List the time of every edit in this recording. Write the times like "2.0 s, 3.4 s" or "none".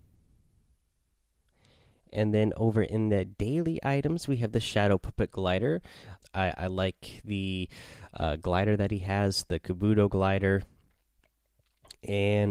6.2 s

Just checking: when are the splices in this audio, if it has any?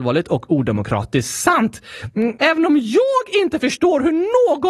2.4 s

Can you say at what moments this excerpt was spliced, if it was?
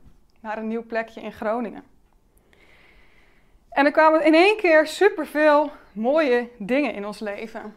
none

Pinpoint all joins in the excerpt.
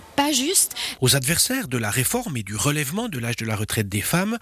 1.0 s

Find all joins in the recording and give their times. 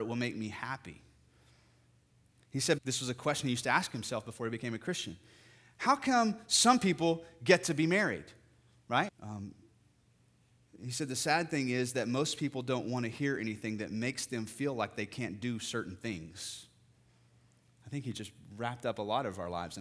2.8 s, 9.1 s

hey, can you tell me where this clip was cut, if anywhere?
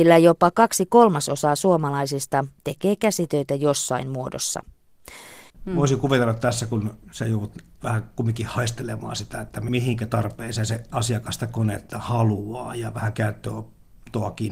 5.5 s

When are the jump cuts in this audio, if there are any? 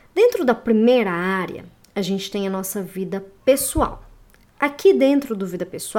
none

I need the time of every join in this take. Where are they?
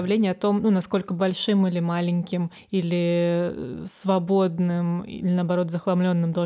none

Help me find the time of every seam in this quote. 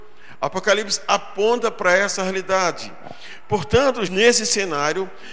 4.1 s

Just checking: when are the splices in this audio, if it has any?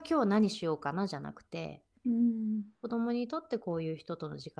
2.7 s

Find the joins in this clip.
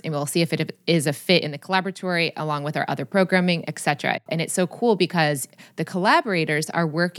4.3 s

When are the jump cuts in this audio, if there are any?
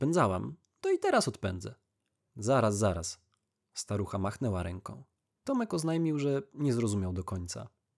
2.3 s, 5.3 s

